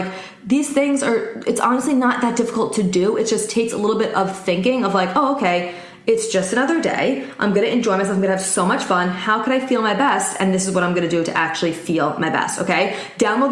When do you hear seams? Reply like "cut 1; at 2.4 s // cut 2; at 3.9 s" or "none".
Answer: none

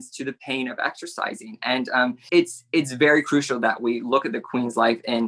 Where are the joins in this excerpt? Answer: cut 1; at 2.3 s

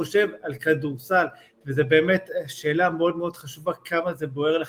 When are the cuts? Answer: none

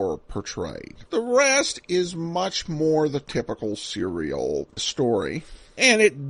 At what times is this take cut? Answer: cut 1; at 1.1 s // cut 2; at 4.8 s

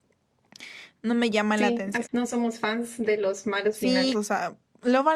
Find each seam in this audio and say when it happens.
cut 1; at 2.0 s // cut 2; at 4.1 s

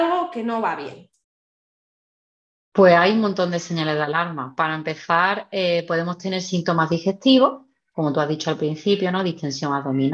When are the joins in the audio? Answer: none

